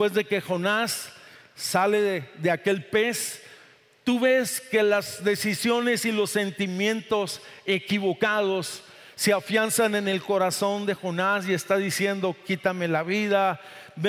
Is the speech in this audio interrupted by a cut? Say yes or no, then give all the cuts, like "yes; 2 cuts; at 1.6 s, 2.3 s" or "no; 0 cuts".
no; 0 cuts